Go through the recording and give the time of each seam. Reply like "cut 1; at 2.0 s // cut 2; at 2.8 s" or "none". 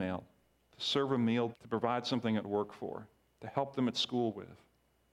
cut 1; at 1.5 s

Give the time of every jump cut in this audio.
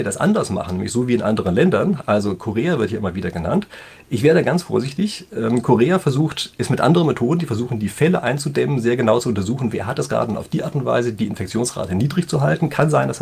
none

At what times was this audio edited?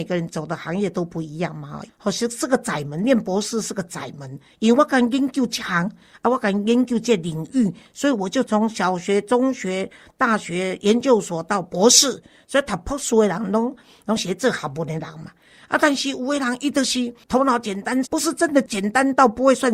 cut 1; at 1.9 s // cut 2; at 18.0 s

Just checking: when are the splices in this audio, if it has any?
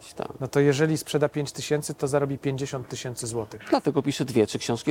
none

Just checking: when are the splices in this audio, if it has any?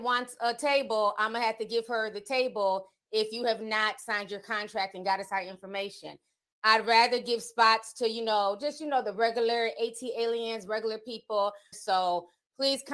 cut 1; at 11.7 s

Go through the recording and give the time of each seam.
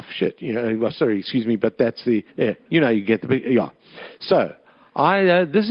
cut 1; at 2.3 s

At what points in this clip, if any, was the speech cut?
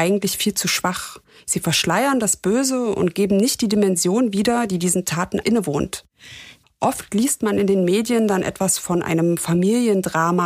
cut 1; at 5.4 s // cut 2; at 6.6 s

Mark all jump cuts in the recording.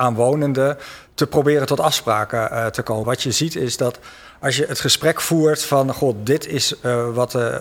cut 1; at 3.0 s

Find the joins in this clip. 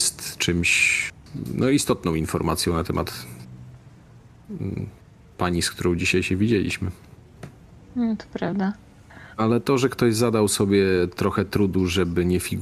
cut 1; at 7.8 s

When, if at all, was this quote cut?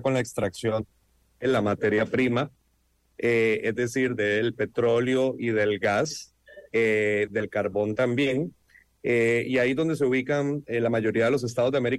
none

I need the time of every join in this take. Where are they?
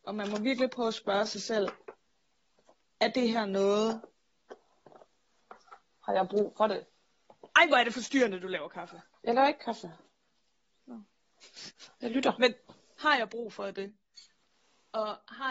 cut 1; at 11.9 s

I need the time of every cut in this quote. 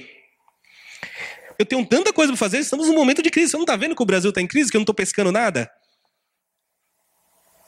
cut 1; at 1.6 s

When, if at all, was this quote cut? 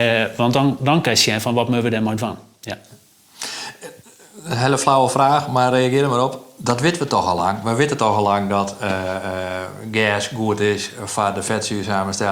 none

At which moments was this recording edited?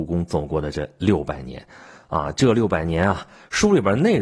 none

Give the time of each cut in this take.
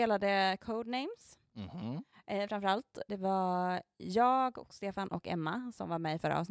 cut 1; at 3.1 s

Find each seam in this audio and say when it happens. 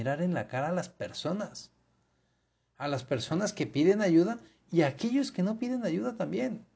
none

